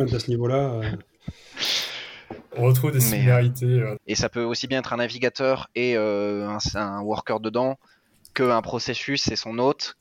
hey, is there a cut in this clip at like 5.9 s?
no; 1 cut; at 4.0 s

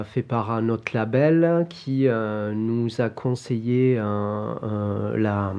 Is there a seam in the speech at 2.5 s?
no; 0 cuts

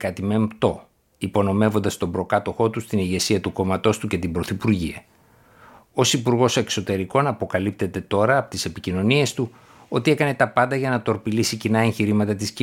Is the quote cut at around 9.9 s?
no; 0 cuts

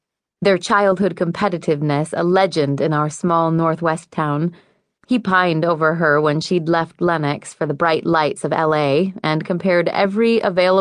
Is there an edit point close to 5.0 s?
yes; 1 cut; at 5.0 s

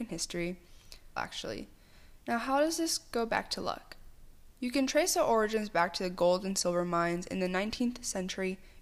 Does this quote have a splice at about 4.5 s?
no; 2 cuts; at 1.2 s, 2.2 s

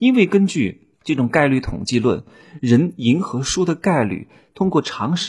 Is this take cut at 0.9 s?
yes; 1 cut; at 0.9 s

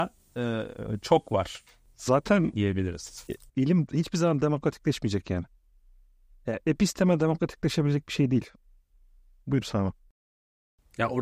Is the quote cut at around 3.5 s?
yes; 1 cut; at 3.5 s

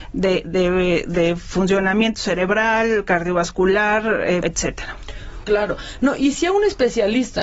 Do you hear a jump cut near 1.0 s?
no; 2 cuts; at 4.4 s, 5.4 s

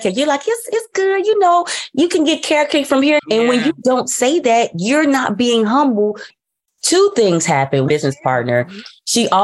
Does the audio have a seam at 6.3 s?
yes; 3 cuts; at 3.2 s, 6.3 s, 7.9 s

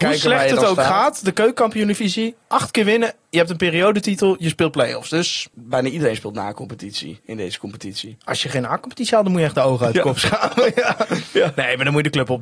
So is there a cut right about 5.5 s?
yes; 1 cut; at 5.5 s

